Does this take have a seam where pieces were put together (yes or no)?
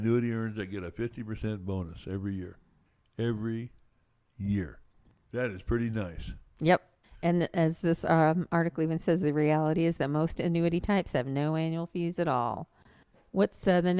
no